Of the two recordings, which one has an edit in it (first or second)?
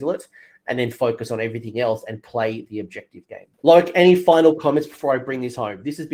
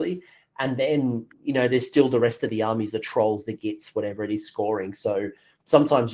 first